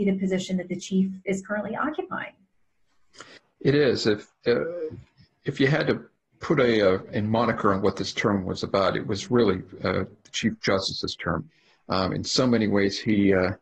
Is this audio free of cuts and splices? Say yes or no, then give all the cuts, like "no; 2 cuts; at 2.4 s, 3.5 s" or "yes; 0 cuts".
yes; 0 cuts